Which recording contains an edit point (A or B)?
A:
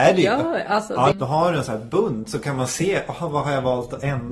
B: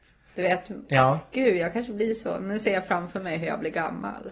A